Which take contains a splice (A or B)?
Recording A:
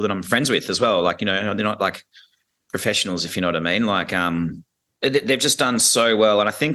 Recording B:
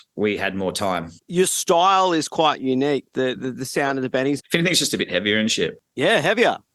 B